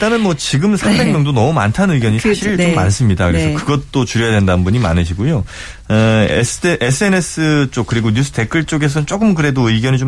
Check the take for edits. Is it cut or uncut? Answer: uncut